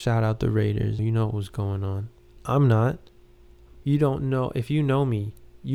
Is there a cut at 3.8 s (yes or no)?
yes